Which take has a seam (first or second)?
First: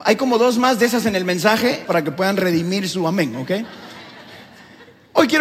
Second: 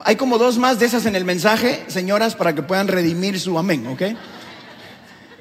first